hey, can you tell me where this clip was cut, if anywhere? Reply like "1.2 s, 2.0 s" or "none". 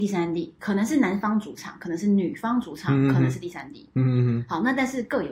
none